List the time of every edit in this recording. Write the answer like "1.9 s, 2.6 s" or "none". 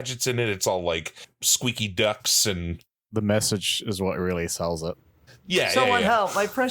none

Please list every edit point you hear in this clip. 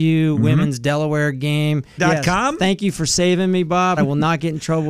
2.0 s, 4.0 s

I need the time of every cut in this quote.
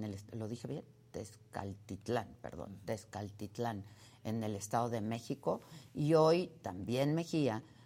none

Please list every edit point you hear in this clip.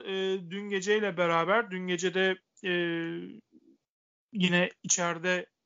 none

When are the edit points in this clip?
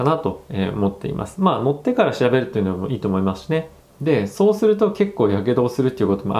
3.8 s

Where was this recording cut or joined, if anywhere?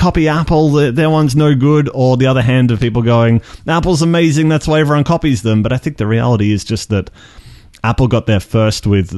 none

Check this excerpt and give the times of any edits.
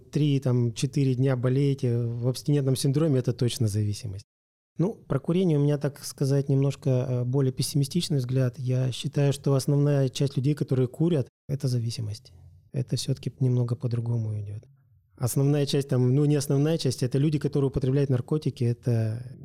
none

